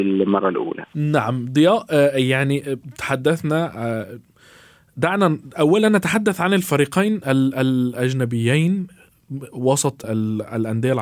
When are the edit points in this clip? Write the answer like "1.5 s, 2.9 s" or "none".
10.0 s

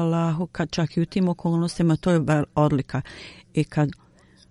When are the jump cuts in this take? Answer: none

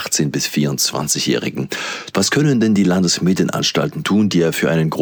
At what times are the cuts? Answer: 2.1 s

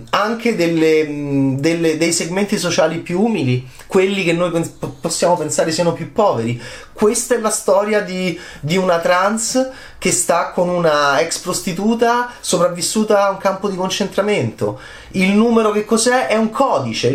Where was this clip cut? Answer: none

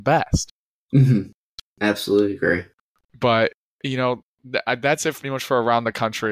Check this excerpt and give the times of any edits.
5.2 s

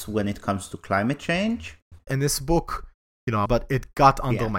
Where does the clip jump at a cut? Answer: 2.1 s, 3.5 s

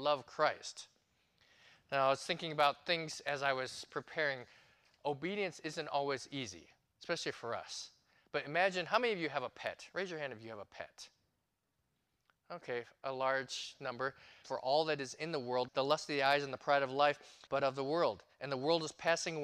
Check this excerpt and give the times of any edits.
14.4 s, 15.7 s, 17.5 s

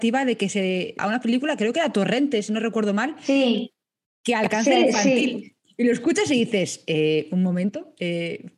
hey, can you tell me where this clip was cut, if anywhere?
1.0 s

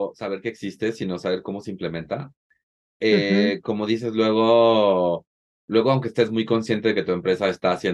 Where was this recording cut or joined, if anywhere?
none

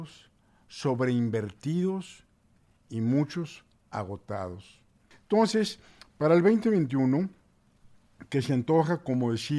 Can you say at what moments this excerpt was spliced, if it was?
5.1 s

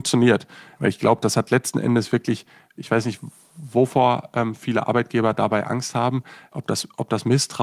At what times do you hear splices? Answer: none

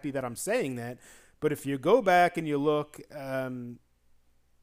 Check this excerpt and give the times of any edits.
none

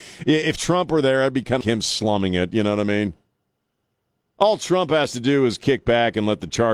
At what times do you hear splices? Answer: 1.6 s

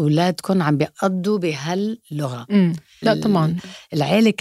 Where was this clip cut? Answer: 3.0 s

